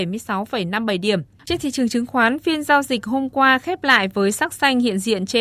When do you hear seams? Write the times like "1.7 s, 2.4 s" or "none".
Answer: 1.4 s